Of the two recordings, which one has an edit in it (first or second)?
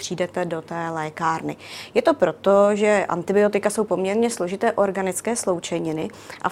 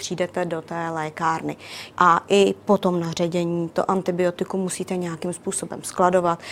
second